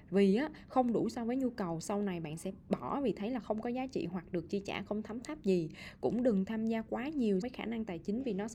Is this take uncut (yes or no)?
no